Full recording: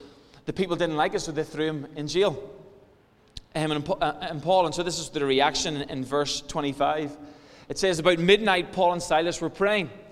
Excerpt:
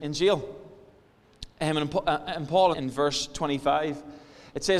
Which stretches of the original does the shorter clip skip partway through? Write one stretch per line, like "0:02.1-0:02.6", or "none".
0:04.7-0:05.9

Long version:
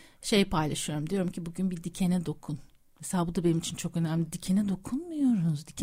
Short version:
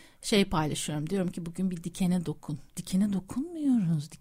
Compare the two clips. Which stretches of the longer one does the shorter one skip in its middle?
0:02.7-0:04.3

